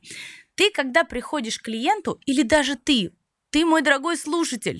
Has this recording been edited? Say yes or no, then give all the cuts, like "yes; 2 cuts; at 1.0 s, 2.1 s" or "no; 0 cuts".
no; 0 cuts